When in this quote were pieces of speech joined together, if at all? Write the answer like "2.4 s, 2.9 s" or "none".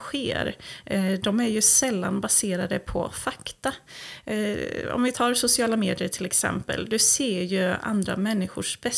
none